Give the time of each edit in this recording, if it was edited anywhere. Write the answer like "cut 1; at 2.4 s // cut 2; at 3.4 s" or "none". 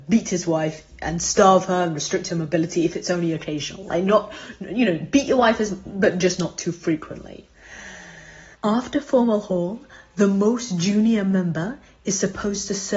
cut 1; at 8.5 s